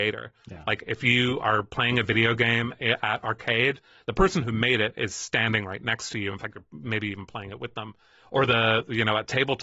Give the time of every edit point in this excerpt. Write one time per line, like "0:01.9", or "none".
none